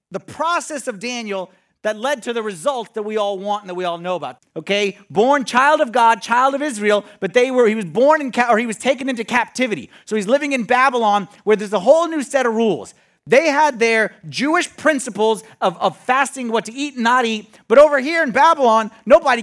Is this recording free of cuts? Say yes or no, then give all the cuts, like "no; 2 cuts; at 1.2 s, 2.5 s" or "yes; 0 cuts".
no; 1 cut; at 4.4 s